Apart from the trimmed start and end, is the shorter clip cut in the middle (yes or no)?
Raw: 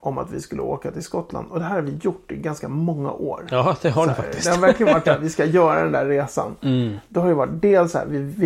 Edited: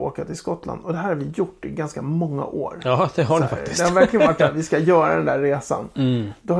no